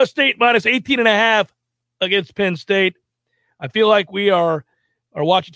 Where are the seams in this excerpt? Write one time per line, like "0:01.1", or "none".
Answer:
none